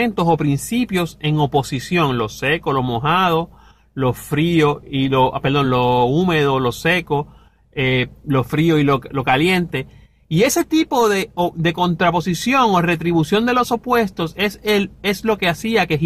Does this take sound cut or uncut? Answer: uncut